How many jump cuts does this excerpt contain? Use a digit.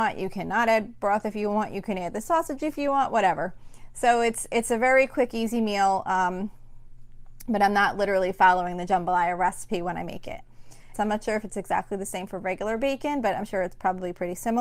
1